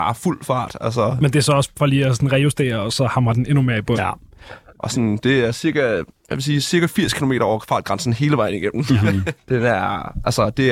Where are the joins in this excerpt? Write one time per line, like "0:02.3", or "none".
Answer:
0:03.9
0:09.4